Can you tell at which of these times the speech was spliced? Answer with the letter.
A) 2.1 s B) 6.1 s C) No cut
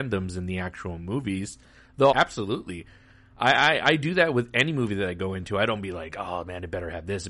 A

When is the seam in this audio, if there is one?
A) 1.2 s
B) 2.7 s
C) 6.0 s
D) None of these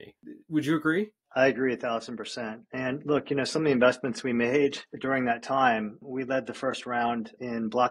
A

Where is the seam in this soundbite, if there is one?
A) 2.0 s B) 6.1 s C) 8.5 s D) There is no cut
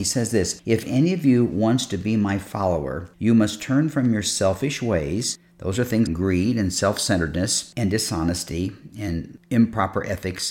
B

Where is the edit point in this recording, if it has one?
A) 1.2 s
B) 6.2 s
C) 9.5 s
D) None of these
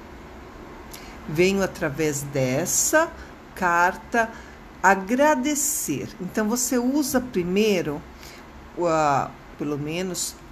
C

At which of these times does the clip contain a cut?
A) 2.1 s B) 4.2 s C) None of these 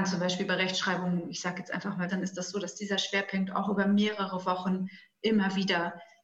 A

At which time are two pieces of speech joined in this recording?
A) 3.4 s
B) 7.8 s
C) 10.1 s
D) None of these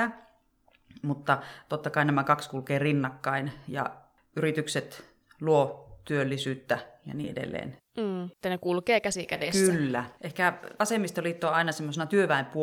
C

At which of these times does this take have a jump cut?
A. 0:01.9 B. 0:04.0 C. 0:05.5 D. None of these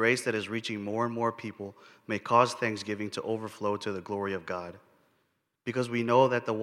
C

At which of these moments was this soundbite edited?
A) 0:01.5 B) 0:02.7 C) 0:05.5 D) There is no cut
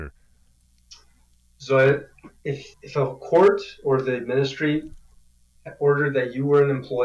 B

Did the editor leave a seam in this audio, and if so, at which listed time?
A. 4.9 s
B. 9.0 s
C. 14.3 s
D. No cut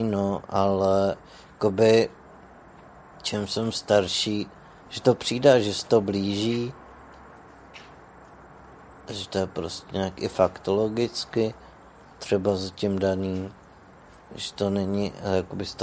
A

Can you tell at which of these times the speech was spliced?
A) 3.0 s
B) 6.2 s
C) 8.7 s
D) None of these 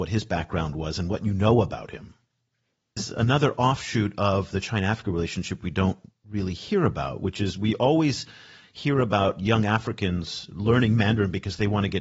A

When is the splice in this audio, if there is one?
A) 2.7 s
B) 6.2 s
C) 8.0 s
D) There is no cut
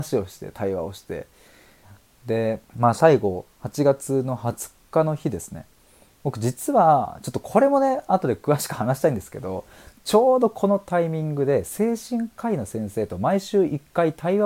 A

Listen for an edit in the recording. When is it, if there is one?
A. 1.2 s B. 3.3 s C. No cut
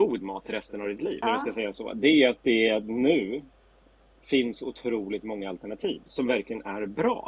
A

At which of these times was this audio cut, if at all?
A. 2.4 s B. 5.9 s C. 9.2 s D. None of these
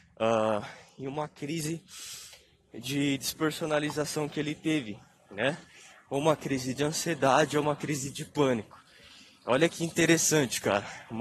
D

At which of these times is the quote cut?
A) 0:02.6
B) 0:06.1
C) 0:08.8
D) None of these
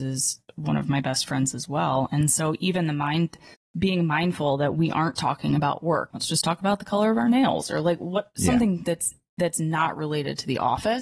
B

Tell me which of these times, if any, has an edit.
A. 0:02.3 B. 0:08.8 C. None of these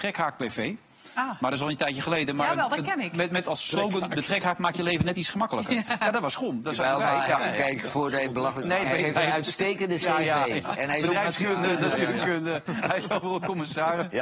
B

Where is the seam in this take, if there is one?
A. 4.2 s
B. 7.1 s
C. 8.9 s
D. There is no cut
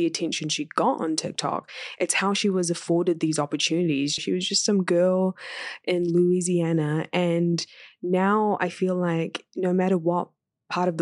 A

